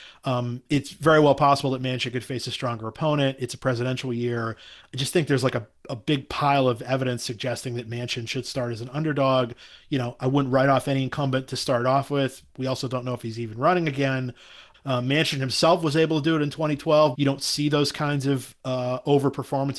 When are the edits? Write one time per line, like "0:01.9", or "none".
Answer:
0:14.7
0:17.1